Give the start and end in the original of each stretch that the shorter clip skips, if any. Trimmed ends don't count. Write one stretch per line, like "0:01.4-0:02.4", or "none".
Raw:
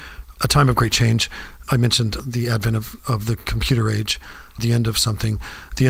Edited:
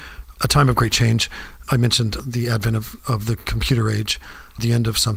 none